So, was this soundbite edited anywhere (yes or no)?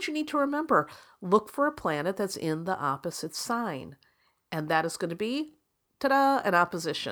no